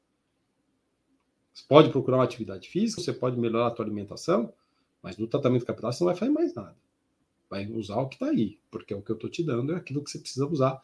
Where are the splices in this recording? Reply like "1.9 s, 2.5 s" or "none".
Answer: 3.0 s